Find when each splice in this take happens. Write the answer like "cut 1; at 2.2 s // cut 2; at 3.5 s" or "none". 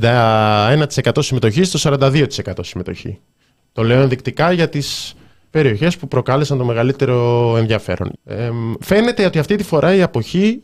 cut 1; at 8.1 s